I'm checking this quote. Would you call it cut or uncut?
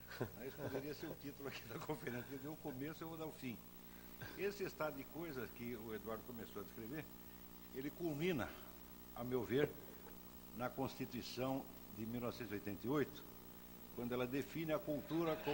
uncut